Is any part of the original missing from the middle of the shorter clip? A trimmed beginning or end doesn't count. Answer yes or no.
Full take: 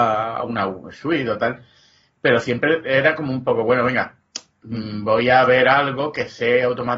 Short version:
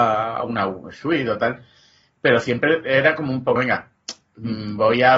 yes